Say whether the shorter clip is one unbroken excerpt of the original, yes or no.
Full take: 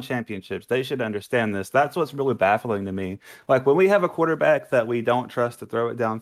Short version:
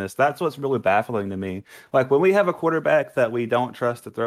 yes